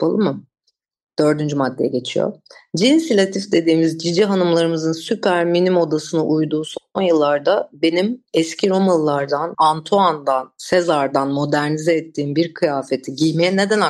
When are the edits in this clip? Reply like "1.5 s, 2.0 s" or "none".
9.5 s